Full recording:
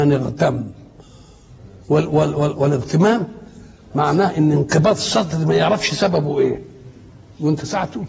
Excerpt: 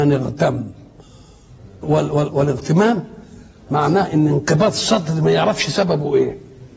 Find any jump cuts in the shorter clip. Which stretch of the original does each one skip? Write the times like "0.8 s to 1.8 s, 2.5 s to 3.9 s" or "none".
1.8 s to 2.1 s